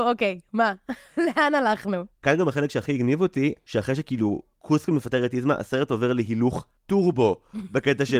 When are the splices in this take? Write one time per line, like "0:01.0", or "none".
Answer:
none